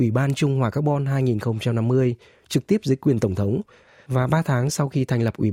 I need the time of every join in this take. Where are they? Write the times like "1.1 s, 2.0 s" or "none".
none